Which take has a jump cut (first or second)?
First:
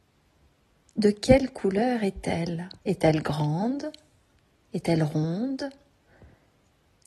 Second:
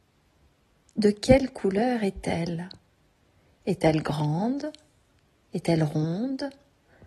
first